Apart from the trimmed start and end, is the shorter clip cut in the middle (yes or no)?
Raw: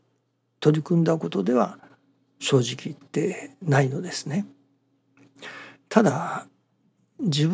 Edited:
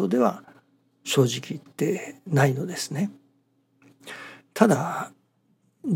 no